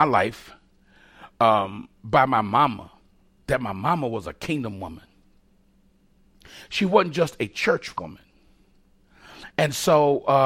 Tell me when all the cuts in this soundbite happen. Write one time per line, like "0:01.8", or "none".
none